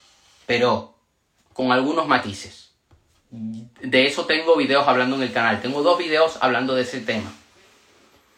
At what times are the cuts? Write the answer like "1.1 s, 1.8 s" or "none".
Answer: none